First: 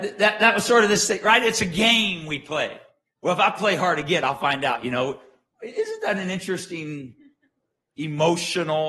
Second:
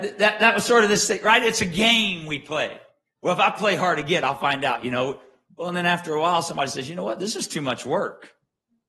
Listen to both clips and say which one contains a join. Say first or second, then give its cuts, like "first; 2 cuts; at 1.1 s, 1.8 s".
second; 1 cut; at 5.5 s